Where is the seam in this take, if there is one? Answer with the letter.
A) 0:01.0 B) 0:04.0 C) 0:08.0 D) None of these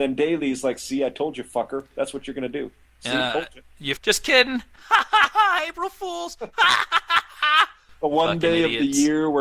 B